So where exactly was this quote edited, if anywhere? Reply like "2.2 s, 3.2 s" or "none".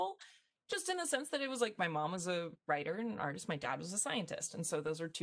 none